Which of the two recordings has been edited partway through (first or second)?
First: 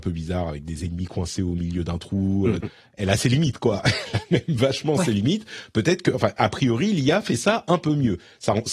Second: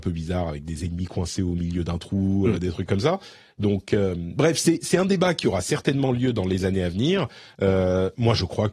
first